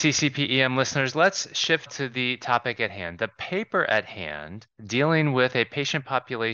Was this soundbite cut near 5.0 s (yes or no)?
no